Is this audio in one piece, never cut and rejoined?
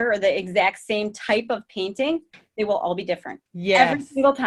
no; 1 cut; at 3.5 s

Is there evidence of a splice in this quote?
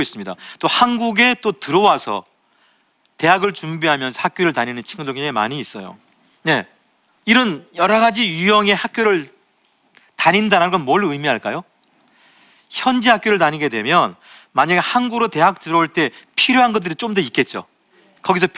no; 0 cuts

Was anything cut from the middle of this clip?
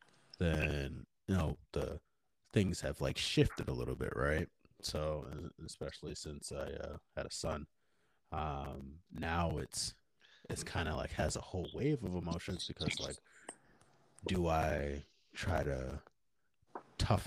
no; 0 cuts

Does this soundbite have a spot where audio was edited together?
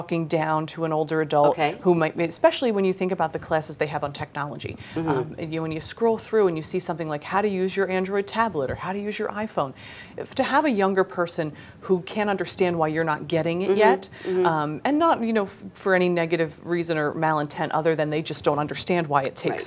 no; 0 cuts

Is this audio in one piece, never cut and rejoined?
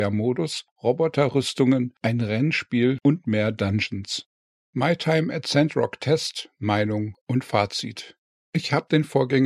yes; 0 cuts

